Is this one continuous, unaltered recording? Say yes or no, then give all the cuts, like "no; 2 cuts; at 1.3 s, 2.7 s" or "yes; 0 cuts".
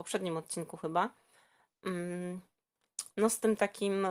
yes; 0 cuts